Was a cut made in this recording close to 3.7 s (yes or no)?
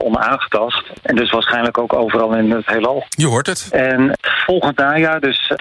yes